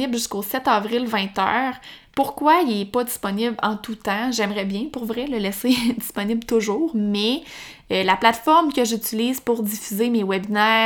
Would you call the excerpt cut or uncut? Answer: uncut